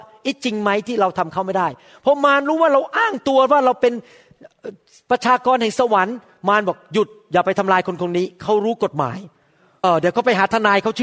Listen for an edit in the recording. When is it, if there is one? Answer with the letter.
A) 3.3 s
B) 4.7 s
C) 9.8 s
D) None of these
C